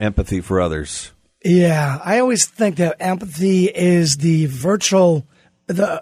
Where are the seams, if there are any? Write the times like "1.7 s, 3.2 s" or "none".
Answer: none